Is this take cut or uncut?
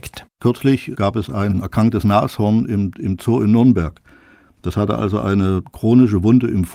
uncut